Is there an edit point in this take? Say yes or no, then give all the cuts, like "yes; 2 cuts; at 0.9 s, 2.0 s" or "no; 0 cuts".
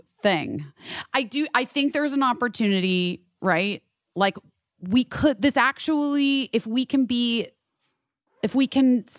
no; 0 cuts